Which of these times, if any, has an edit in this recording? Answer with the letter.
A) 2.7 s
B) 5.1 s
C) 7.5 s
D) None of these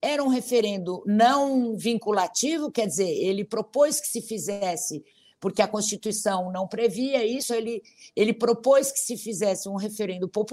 C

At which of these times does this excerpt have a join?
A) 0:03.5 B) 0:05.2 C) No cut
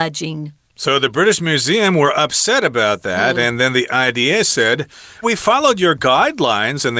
B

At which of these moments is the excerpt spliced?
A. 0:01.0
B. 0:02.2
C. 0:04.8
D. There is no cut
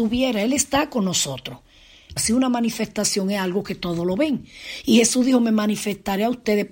B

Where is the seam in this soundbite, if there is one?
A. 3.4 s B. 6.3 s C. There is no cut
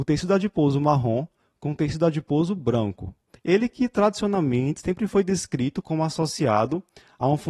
A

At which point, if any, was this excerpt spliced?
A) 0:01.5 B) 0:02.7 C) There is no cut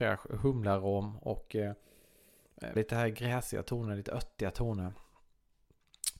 B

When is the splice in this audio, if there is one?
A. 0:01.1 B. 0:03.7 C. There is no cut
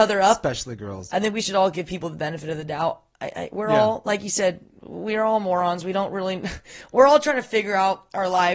A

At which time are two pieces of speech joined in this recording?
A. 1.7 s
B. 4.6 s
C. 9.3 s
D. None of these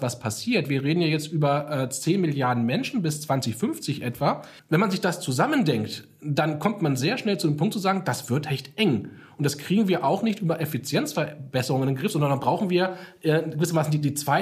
B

